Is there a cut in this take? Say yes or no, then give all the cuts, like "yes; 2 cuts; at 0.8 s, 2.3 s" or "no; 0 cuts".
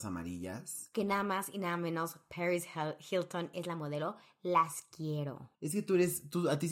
yes; 1 cut; at 5.5 s